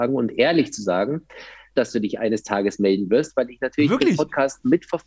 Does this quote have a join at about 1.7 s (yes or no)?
yes